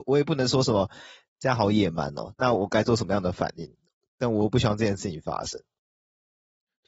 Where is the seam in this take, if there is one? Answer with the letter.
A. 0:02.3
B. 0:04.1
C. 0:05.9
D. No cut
A